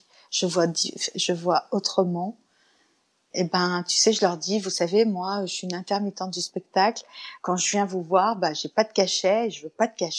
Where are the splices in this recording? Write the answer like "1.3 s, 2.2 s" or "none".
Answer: none